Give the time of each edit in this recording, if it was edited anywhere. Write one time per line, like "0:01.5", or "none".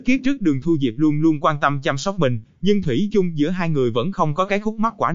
none